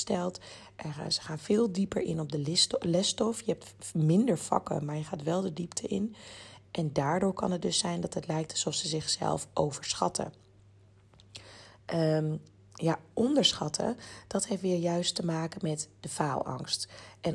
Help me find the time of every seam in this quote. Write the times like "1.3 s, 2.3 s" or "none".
none